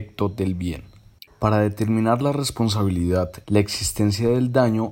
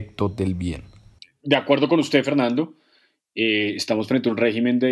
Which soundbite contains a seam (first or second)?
first